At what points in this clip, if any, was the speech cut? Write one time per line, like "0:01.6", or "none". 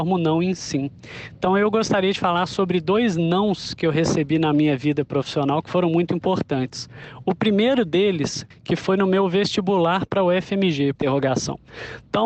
0:08.5
0:10.9

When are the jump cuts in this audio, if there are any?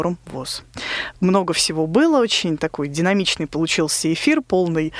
none

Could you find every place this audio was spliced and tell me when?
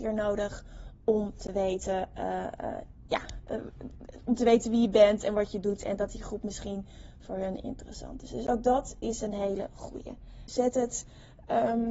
0:10.5

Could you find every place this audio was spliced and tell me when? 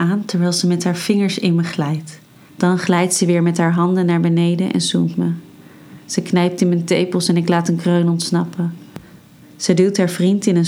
0:02.5
0:09.4

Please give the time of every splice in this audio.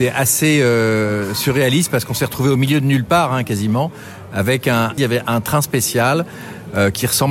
0:05.0

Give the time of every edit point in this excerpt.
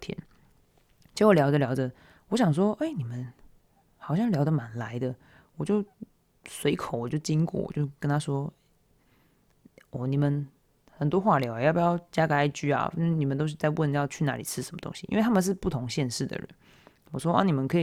none

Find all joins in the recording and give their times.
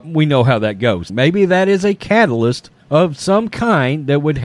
0:01.1
0:02.8

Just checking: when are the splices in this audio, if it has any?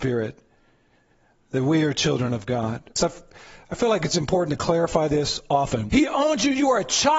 0:03.0
0:05.9

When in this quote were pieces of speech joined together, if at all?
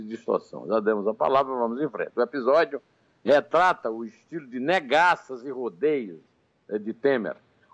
none

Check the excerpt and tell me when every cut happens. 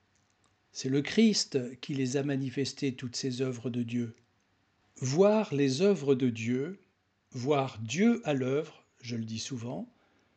0:04.8

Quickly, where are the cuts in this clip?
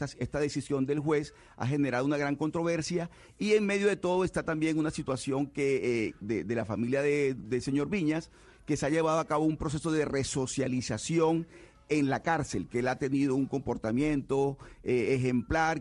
0:06.2
0:07.4

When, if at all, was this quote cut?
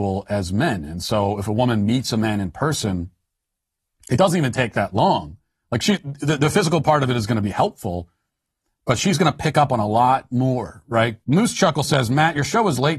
0:11.2

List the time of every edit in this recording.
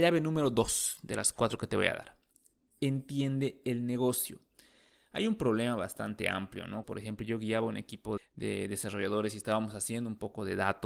0:06.8
0:08.2

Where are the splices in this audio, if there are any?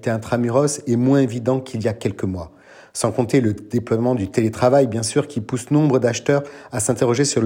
none

